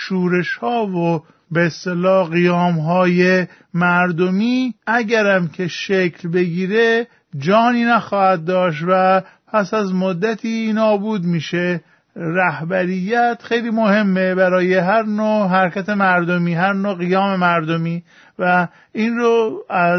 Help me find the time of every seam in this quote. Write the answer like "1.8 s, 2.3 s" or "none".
4.8 s